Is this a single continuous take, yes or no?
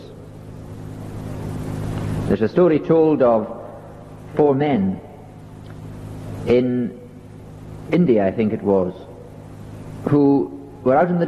yes